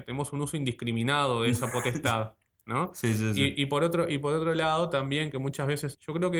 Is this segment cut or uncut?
uncut